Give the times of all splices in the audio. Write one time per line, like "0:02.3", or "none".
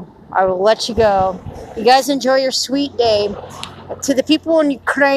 none